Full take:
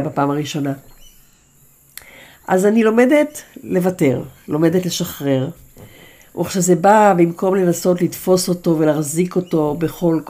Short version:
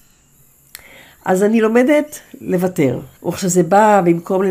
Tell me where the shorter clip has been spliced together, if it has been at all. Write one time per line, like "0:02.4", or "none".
0:03.2